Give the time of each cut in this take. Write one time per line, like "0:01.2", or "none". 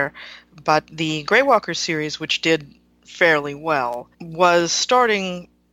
0:04.1